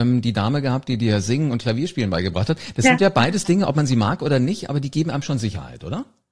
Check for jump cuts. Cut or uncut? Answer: uncut